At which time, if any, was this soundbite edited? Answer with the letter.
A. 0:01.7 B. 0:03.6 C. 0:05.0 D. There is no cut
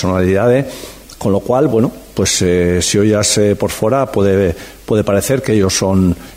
D